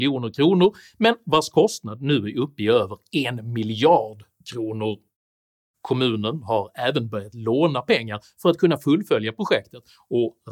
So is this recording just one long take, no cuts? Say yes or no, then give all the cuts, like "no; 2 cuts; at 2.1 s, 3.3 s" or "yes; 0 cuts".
yes; 0 cuts